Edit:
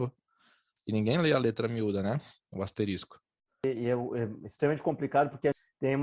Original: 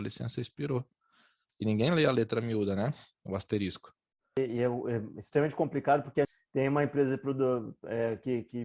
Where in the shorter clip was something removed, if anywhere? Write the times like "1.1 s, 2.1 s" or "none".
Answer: none